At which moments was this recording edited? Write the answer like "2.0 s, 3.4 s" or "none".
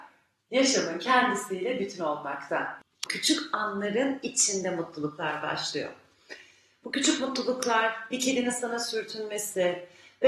3.1 s